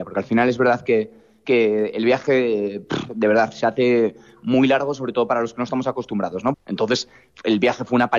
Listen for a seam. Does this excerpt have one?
yes; 1 cut; at 6.5 s

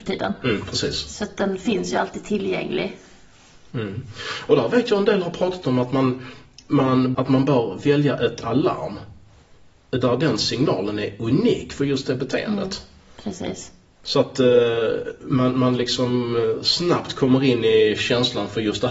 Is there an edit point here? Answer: yes; 1 cut; at 7.1 s

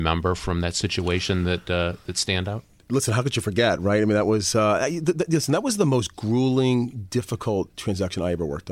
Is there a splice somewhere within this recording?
no; 0 cuts

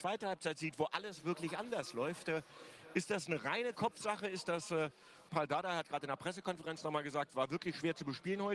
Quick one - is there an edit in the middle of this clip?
yes; 1 cut; at 5.3 s

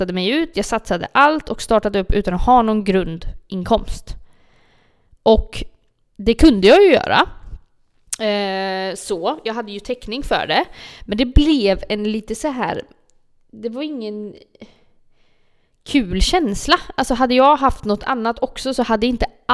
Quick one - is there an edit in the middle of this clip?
no; 0 cuts

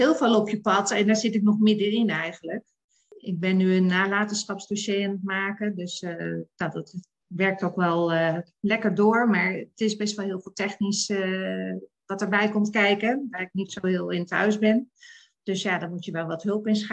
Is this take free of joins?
yes; 0 cuts

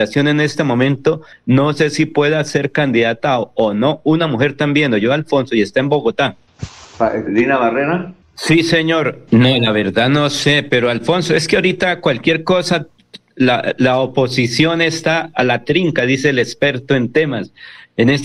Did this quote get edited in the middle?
yes; 2 cuts; at 7.3 s, 9.3 s

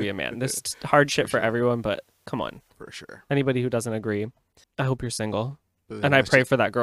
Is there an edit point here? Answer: yes; 2 cuts; at 2.7 s, 4.6 s

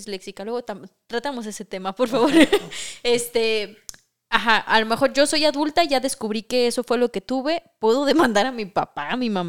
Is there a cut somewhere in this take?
no; 0 cuts

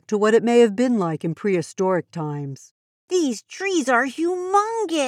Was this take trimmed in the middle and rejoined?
yes; 1 cut; at 3.0 s

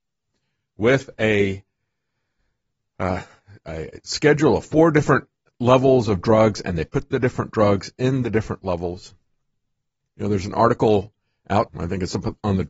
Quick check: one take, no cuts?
no; 2 cuts; at 10.0 s, 11.7 s

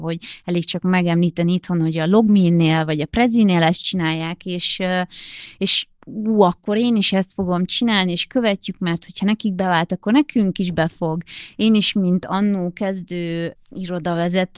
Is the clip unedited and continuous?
no; 1 cut; at 11.5 s

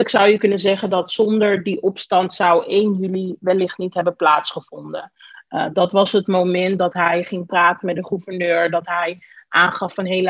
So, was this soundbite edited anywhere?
no; 0 cuts

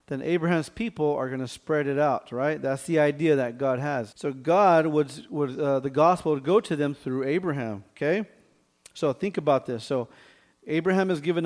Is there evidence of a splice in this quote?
yes; 1 cut; at 4.1 s

